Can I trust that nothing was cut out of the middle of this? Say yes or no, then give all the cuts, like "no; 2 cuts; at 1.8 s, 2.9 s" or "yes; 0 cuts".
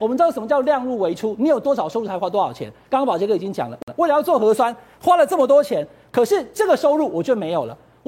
yes; 0 cuts